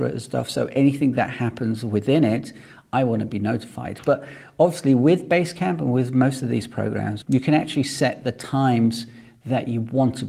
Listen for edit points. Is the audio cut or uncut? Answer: cut